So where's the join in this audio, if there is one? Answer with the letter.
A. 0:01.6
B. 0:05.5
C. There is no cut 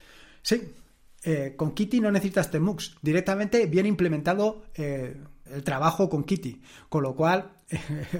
B